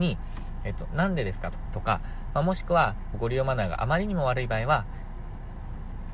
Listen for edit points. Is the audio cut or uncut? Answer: cut